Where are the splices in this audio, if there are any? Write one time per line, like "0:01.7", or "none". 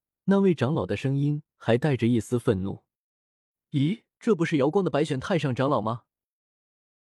0:04.1